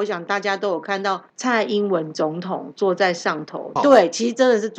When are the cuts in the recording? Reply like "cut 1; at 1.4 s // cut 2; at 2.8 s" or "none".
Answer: cut 1; at 3.8 s